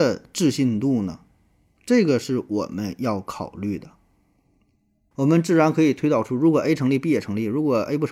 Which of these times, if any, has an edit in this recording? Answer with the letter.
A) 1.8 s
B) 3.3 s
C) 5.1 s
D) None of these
C